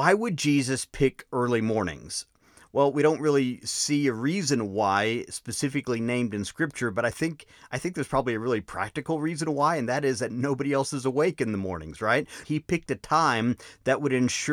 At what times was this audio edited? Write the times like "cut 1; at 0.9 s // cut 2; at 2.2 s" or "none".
cut 1; at 12.4 s

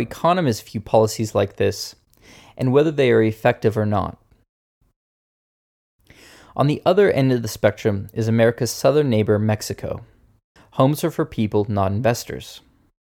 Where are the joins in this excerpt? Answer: cut 1; at 10.6 s

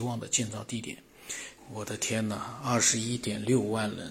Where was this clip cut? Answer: cut 1; at 1.6 s

